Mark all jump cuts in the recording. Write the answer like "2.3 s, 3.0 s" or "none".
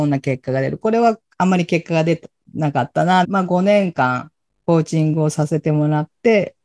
3.2 s